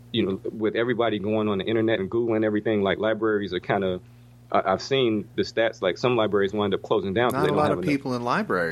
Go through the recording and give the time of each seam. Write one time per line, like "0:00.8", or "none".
0:02.0